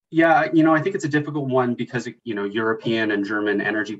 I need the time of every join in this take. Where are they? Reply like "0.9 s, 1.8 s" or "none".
2.2 s